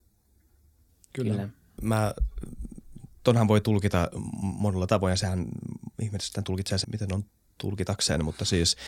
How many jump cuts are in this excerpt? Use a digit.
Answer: 2